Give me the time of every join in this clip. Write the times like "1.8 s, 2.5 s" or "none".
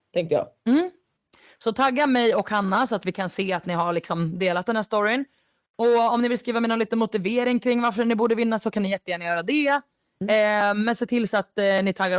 none

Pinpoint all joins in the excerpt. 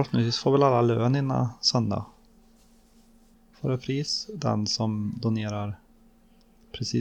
3.3 s

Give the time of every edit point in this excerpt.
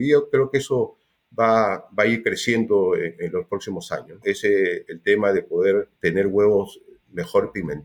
4.2 s, 6.0 s

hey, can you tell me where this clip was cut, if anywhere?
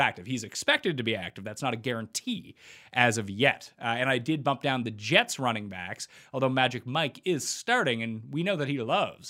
none

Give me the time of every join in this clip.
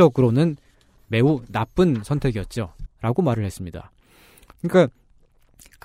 2.9 s

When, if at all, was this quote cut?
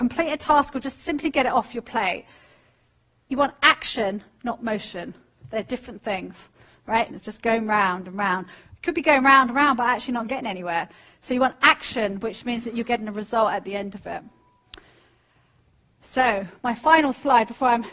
7.1 s

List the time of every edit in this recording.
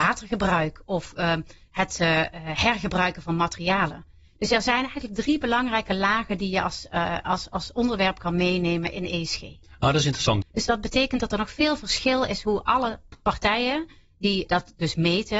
10.4 s, 14.5 s

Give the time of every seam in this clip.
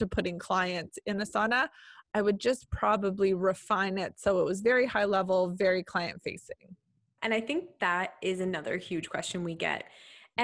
none

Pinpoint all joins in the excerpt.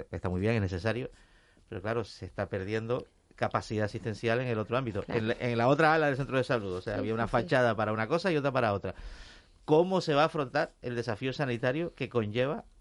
none

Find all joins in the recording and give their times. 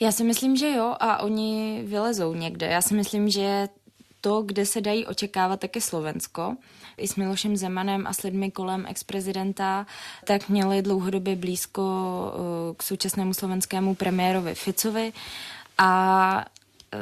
7.0 s, 10.2 s

